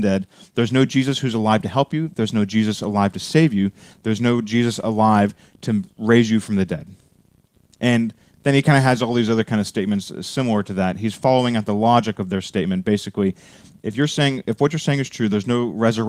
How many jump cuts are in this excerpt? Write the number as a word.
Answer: zero